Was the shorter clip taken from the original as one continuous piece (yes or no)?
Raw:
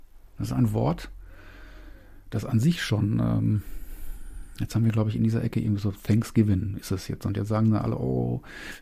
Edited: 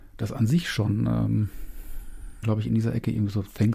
no